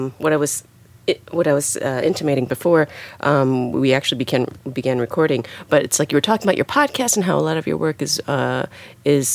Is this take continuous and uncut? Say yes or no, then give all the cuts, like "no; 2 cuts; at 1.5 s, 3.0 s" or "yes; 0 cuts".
yes; 0 cuts